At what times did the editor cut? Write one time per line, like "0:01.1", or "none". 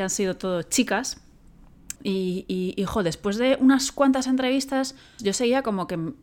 0:02.0
0:05.2